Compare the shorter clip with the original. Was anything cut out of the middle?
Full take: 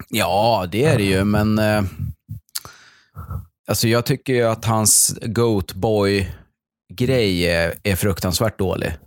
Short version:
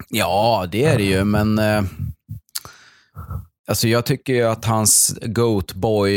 no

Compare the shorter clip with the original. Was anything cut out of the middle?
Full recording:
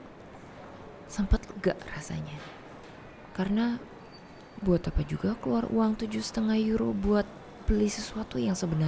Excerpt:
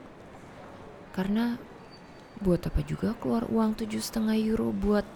yes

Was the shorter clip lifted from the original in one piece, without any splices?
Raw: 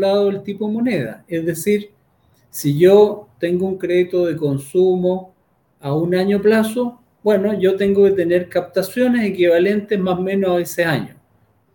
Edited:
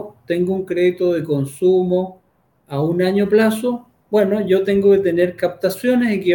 yes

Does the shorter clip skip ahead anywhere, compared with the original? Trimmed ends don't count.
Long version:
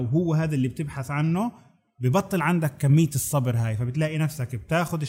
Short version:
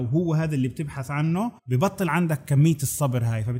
yes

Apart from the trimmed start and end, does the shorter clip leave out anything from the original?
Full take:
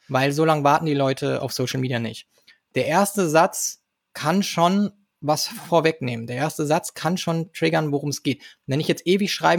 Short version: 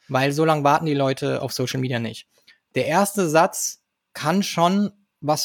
no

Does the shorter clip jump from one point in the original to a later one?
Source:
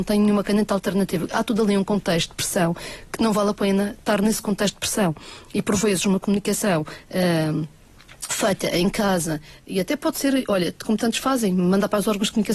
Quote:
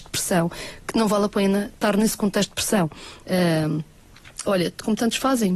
yes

